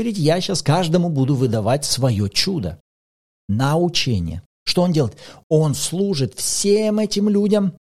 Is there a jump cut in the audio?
yes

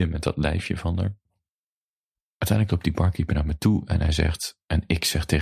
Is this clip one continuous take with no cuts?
yes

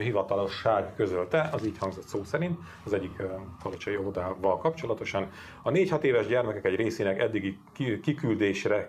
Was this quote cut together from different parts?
no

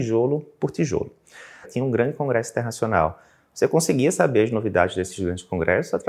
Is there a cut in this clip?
yes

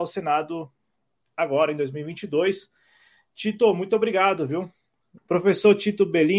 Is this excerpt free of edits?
no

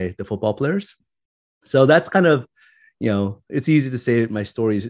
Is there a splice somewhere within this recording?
yes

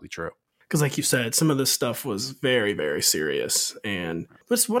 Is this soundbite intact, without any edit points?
yes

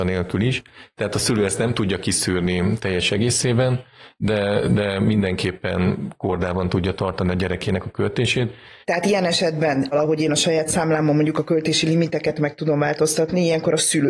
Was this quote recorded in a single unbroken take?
no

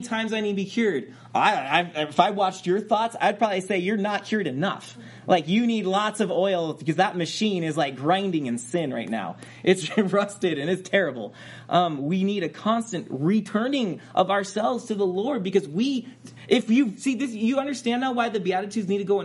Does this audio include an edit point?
no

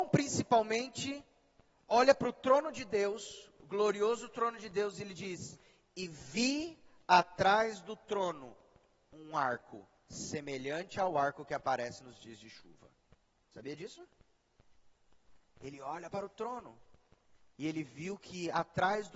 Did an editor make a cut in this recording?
no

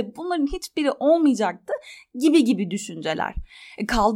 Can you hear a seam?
no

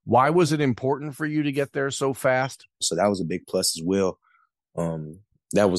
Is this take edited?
yes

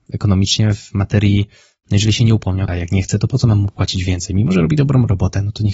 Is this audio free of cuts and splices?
no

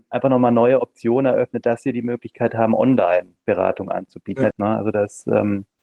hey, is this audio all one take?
no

